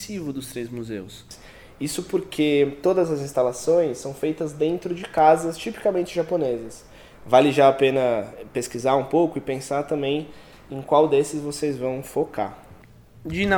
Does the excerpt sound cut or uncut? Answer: cut